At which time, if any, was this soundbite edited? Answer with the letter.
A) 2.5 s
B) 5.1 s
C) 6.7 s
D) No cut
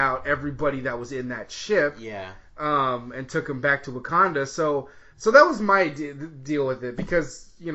B